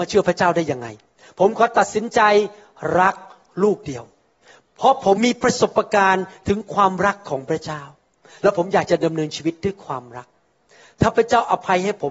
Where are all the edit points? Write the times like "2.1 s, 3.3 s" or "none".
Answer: 5.2 s